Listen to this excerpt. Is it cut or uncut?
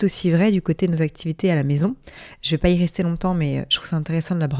uncut